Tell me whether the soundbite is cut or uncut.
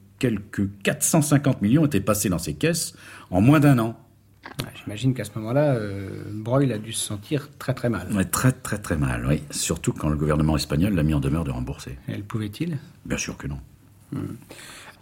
uncut